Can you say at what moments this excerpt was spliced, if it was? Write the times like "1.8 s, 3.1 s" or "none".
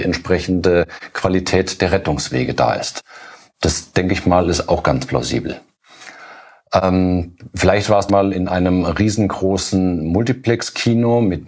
6.6 s, 8.1 s